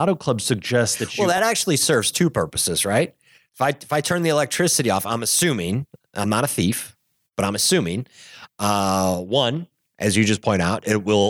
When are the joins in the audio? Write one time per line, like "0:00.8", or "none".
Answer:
none